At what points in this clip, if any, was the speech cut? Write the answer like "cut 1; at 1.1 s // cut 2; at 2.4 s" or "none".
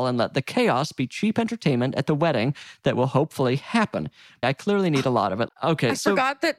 cut 1; at 4.4 s // cut 2; at 5.5 s